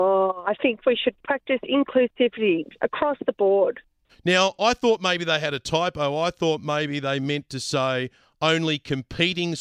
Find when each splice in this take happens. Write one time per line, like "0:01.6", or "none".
0:04.1